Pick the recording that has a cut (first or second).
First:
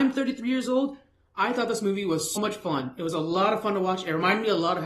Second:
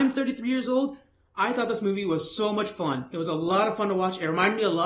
first